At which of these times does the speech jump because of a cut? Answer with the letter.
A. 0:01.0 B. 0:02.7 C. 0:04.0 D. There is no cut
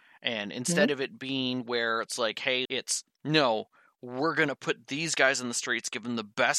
B